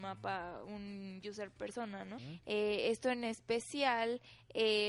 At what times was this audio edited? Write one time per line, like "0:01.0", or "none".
0:02.2